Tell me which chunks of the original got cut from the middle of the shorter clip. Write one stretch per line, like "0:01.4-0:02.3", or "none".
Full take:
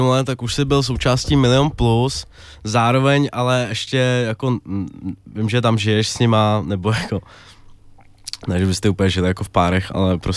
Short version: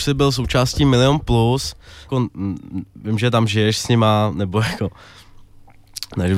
0:02.6-0:04.4